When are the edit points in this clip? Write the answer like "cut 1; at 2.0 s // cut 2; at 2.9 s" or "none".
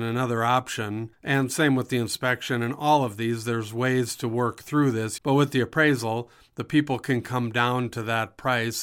cut 1; at 5.2 s